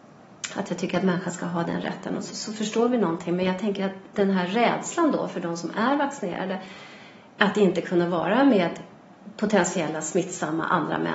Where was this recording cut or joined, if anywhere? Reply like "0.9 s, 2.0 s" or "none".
2.3 s